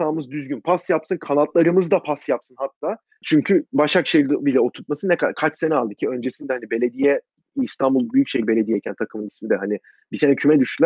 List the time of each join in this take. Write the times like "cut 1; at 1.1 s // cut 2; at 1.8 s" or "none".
cut 1; at 3.2 s